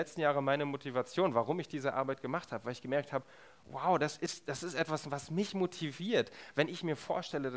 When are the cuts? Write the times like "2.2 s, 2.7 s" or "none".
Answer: none